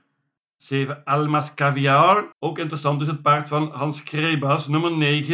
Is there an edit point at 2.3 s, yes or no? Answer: yes